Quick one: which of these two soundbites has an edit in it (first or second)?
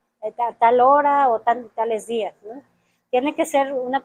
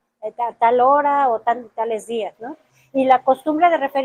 second